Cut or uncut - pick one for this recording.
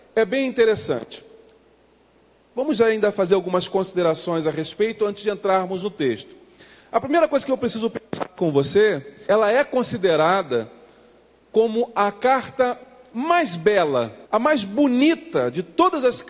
cut